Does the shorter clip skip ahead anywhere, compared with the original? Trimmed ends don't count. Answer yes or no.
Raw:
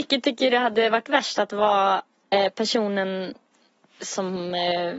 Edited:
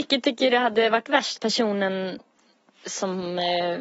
yes